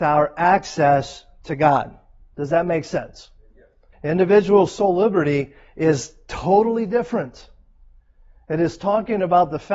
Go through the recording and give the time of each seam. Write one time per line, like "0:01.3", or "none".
0:03.9